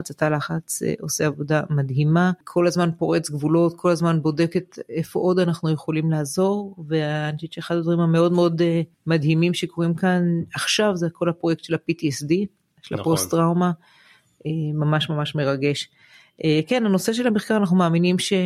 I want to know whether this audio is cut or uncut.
cut